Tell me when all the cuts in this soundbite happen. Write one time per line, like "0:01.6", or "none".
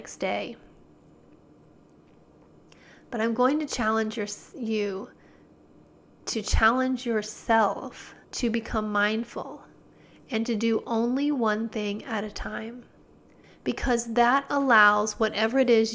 0:08.2
0:13.4